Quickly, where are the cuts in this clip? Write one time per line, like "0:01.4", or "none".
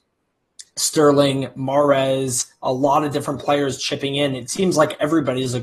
none